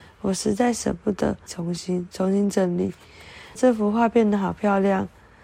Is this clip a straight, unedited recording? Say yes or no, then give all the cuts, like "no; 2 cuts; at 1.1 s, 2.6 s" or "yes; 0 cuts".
no; 2 cuts; at 1.5 s, 3.6 s